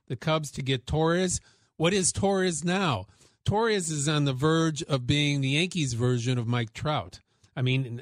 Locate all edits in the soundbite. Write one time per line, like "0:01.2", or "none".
none